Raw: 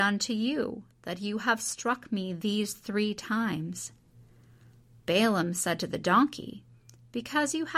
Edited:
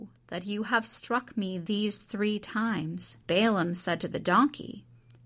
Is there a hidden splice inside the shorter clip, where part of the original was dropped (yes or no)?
yes